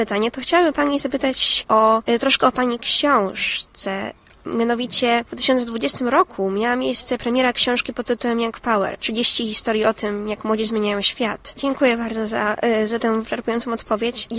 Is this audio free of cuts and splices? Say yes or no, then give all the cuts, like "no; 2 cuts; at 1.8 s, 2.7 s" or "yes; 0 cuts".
no; 1 cut; at 11.5 s